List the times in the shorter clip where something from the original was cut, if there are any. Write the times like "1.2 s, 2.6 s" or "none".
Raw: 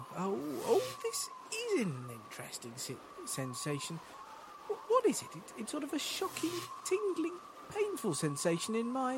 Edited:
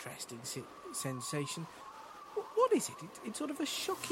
none